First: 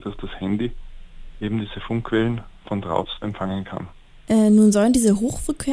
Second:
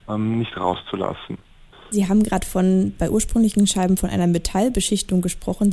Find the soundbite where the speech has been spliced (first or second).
second